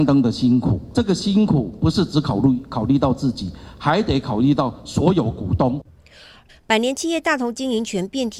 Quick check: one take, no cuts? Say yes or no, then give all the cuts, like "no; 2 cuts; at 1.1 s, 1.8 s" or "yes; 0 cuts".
no; 1 cut; at 6.5 s